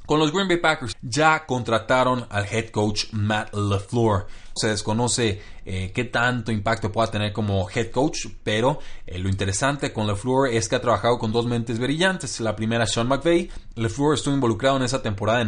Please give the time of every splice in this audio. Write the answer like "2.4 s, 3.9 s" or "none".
0.9 s, 4.6 s, 13.7 s